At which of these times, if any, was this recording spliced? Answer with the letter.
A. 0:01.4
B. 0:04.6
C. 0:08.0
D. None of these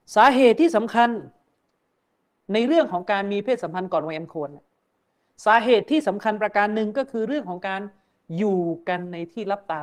D